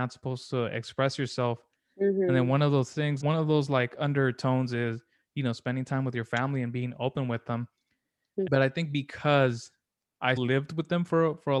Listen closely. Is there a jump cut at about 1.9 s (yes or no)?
no